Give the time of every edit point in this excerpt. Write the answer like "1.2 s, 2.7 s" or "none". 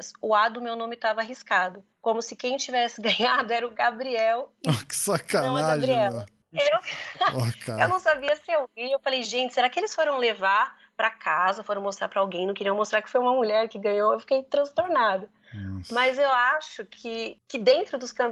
none